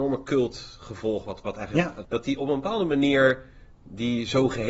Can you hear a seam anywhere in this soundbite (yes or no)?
yes